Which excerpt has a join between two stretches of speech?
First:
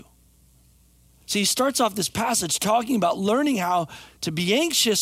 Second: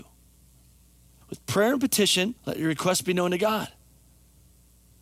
second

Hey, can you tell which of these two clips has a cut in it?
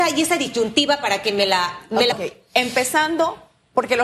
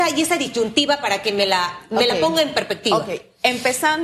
first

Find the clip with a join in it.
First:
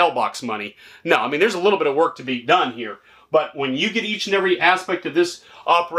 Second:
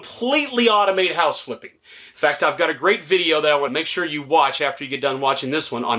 second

